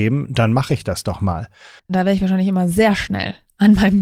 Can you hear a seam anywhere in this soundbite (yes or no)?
yes